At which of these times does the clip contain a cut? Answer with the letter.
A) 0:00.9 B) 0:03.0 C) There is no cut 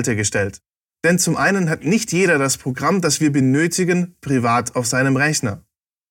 C